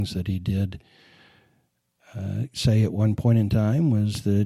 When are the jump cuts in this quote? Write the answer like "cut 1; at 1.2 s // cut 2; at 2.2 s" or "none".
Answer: none